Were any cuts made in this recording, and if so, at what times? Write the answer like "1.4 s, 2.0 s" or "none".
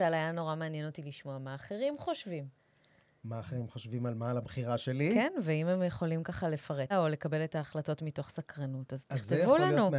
6.9 s